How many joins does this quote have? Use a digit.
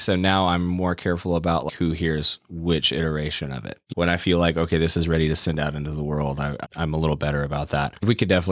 2